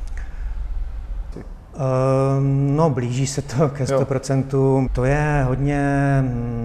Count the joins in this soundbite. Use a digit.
2